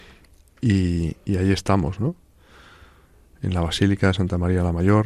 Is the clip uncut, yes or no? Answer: yes